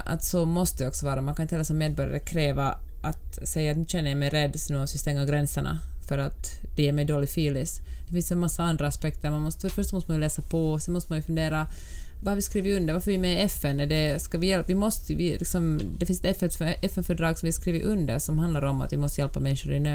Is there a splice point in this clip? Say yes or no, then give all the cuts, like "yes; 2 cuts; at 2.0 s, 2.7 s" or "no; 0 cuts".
yes; 1 cut; at 12.2 s